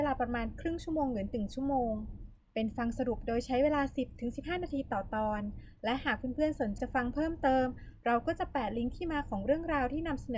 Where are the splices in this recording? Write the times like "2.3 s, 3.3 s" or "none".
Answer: 6.8 s